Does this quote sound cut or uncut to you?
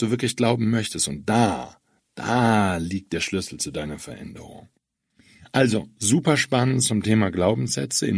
uncut